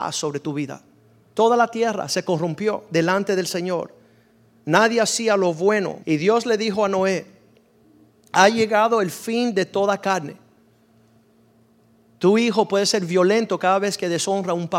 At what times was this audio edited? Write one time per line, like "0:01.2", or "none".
0:01.3
0:06.0
0:12.2